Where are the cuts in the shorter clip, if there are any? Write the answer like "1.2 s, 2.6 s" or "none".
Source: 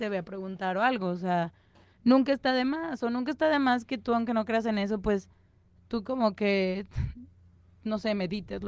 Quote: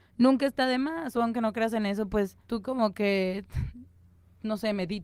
1.1 s, 2.4 s